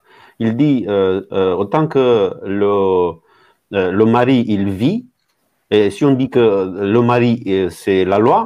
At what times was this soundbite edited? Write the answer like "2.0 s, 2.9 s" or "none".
none